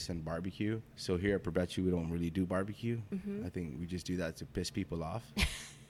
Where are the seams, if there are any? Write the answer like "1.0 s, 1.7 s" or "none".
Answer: none